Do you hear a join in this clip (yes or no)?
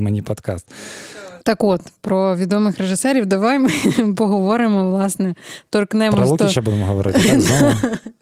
yes